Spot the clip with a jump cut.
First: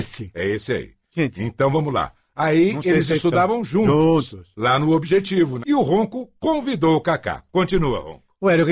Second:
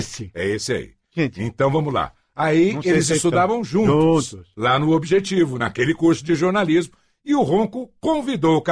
first; 1 cut; at 5.6 s

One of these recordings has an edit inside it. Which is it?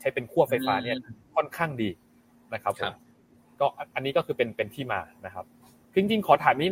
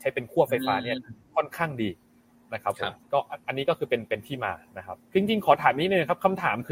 second; 2 cuts; at 3.0 s, 5.1 s

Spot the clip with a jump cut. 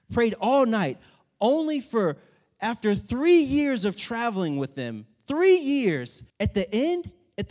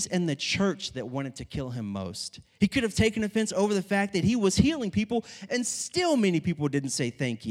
first; 1 cut; at 6.3 s

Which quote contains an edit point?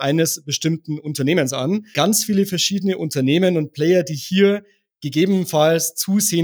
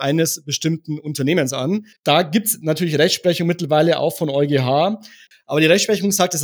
second; 2 cuts; at 1.9 s, 5.3 s

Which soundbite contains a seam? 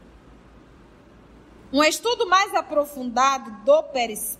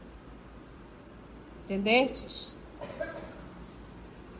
first; 1 cut; at 1.6 s

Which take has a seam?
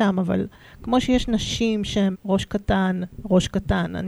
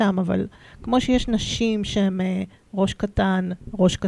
first; 1 cut; at 2.1 s

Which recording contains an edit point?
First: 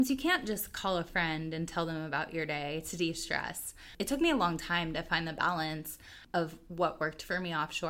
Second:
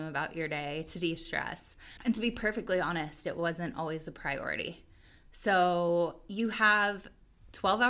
second; 1 cut; at 2.0 s

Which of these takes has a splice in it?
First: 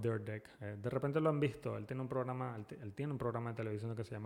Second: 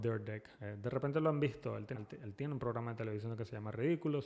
second; 1 cut; at 1.9 s

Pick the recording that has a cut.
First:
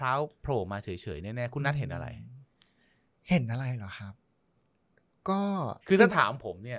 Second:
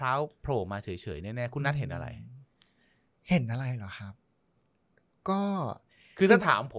first; 1 cut; at 5.8 s

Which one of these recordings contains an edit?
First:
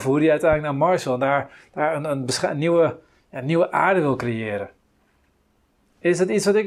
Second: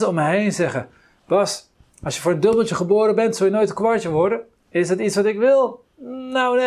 second; 1 cut; at 4.6 s

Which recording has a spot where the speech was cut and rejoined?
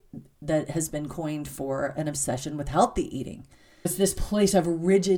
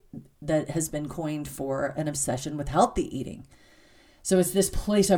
first; 1 cut; at 3.9 s

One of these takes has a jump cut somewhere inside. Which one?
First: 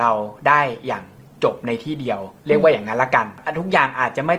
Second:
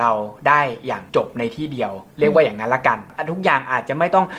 second; 1 cut; at 1.1 s

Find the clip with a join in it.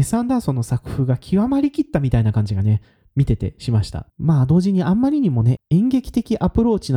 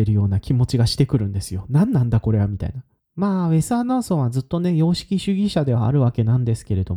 first; 2 cuts; at 4.1 s, 5.6 s

